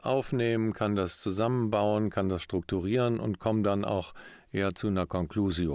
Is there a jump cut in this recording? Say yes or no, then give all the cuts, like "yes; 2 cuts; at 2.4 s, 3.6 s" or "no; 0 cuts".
no; 0 cuts